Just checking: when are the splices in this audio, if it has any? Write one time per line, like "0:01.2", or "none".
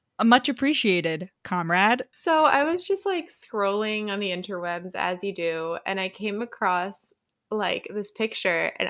0:02.1